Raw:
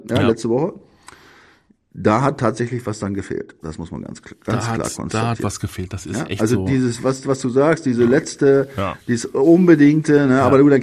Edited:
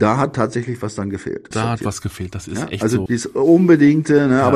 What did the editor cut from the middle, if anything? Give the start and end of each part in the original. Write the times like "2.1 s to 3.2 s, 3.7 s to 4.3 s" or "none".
3.5 s to 5.1 s, 6.6 s to 9.0 s